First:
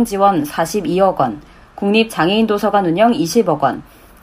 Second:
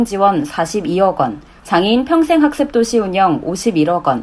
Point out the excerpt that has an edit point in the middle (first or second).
second